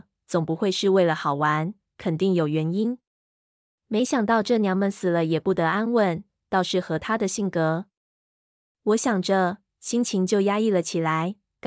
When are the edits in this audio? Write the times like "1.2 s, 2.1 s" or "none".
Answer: none